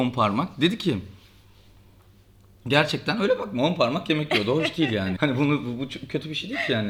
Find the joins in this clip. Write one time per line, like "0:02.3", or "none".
0:05.2